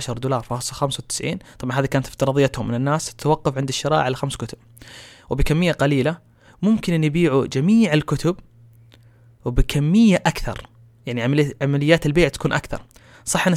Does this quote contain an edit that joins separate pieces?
no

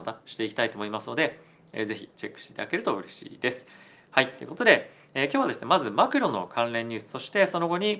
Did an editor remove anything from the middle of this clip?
no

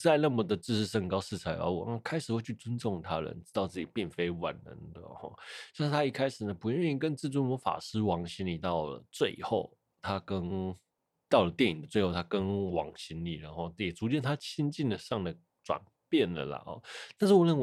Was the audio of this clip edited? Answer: no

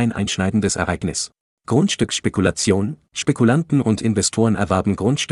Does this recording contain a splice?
yes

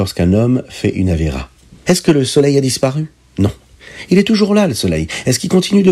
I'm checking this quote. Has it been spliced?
yes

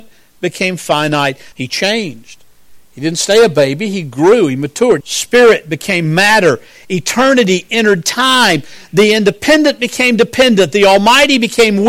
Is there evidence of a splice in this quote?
yes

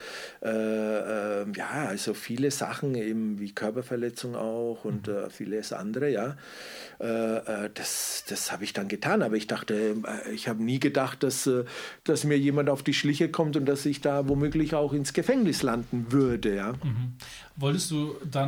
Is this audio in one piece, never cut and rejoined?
no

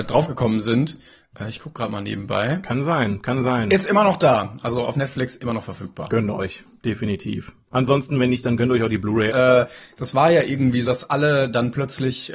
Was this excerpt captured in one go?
no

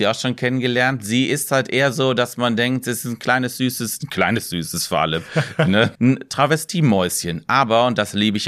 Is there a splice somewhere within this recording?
yes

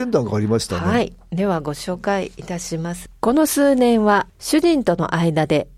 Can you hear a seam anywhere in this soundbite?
no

